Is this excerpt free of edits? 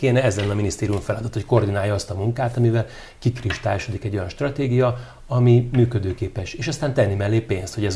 yes; 0 cuts

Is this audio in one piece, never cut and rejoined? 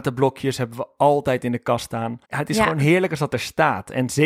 no; 1 cut; at 2.2 s

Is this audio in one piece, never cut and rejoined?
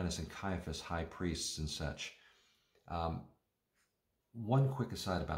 yes; 0 cuts

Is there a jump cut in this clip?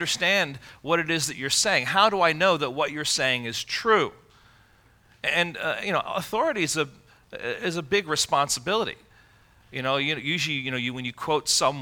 no; 0 cuts

